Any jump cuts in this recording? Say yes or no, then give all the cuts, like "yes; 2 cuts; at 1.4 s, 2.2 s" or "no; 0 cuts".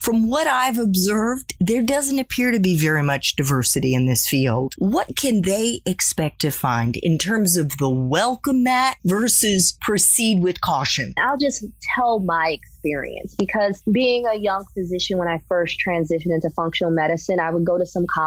yes; 1 cut; at 11.2 s